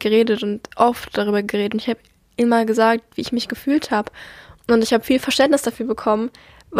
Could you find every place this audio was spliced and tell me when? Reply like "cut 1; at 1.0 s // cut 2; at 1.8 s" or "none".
none